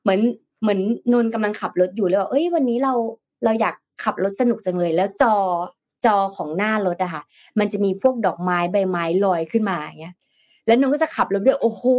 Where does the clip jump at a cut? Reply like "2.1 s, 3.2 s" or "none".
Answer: none